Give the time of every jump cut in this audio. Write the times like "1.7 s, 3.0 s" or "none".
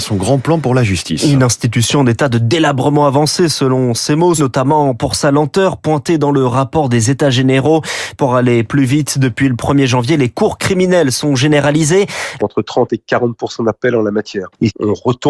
4.4 s, 12.4 s